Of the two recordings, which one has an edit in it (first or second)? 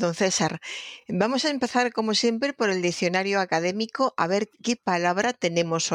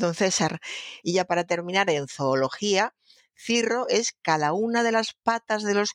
second